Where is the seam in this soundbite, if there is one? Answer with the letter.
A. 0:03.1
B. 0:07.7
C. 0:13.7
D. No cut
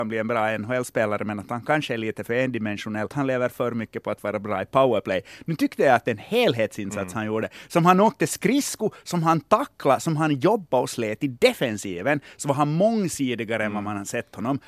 A